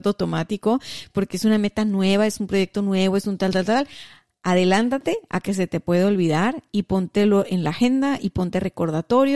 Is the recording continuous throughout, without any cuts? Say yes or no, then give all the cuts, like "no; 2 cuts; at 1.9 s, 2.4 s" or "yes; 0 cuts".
yes; 0 cuts